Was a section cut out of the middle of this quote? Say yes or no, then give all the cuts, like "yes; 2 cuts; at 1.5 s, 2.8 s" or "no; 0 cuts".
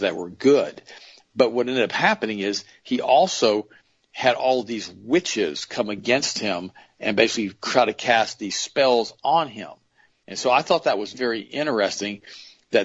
yes; 1 cut; at 11.1 s